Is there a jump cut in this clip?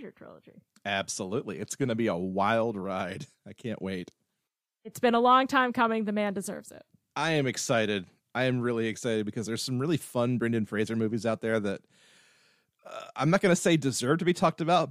no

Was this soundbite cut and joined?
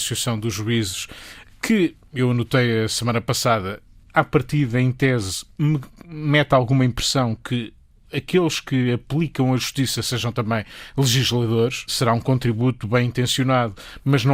yes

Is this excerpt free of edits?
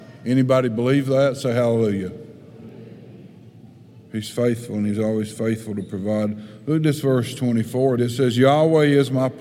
no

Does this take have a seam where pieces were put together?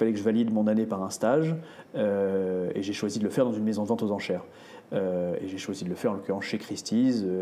no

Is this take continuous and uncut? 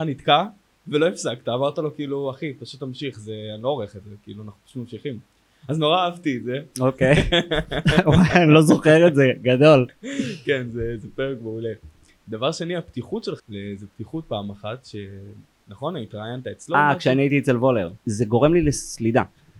no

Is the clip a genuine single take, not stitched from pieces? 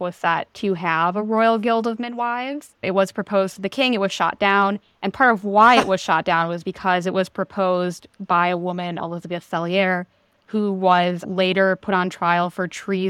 yes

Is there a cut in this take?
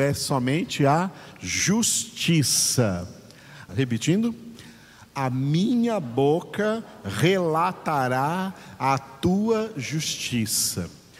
yes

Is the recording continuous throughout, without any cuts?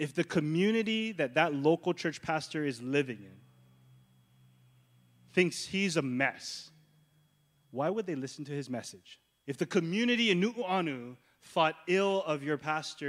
no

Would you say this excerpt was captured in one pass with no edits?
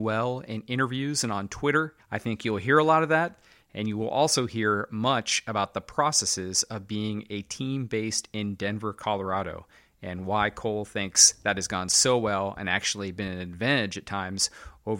yes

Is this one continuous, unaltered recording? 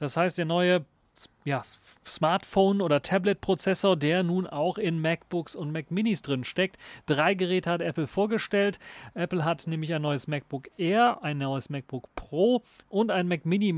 yes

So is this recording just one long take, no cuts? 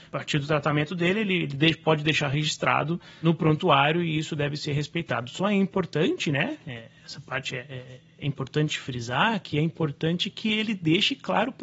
yes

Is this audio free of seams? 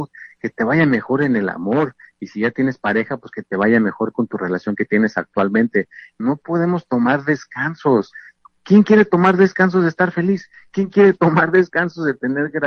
no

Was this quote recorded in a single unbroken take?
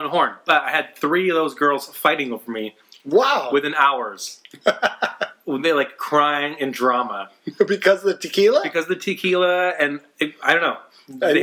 yes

